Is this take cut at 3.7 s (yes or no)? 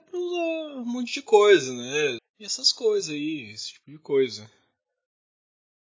no